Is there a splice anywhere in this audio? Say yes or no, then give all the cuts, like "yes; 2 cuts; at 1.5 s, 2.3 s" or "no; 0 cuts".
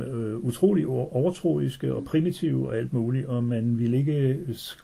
no; 0 cuts